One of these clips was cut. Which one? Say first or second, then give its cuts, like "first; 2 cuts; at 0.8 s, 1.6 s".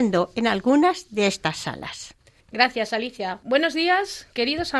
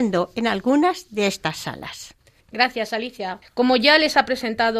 second; 1 cut; at 3.4 s